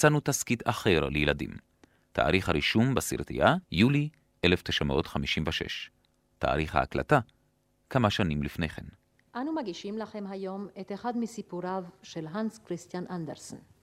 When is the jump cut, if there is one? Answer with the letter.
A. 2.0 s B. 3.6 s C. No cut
B